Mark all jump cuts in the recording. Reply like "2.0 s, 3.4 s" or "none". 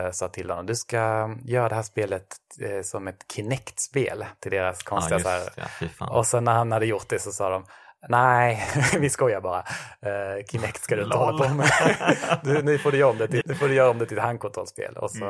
13.4 s